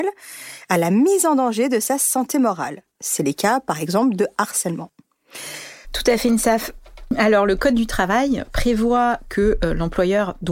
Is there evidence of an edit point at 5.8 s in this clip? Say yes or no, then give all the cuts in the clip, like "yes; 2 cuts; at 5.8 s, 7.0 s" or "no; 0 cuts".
yes; 1 cut; at 5.8 s